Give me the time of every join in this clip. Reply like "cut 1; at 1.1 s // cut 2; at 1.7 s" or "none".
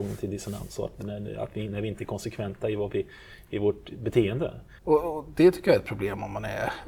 cut 1; at 4.8 s